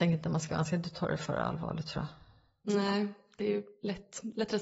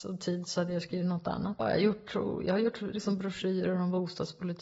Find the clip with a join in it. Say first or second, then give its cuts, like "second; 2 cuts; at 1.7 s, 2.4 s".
second; 1 cut; at 1.6 s